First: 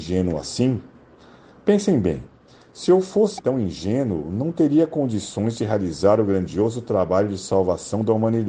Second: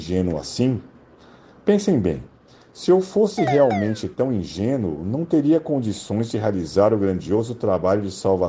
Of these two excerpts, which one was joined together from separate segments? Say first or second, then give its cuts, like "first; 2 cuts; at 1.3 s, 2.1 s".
first; 1 cut; at 3.4 s